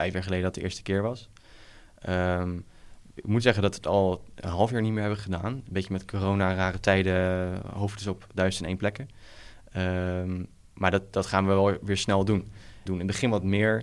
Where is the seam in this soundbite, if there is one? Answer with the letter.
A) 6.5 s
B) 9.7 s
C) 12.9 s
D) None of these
C